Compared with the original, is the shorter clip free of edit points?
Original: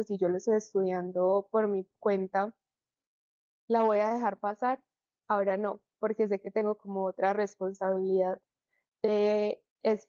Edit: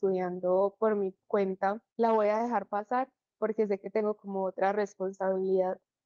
no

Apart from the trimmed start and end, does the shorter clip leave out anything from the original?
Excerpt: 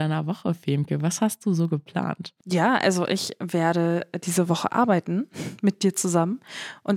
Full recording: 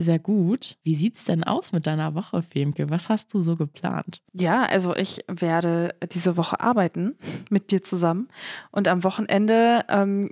no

